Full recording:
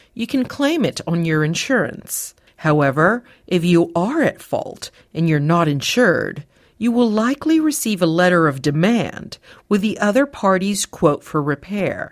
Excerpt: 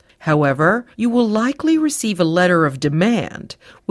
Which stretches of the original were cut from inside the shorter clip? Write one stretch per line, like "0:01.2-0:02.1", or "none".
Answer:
0:03.3-0:06.7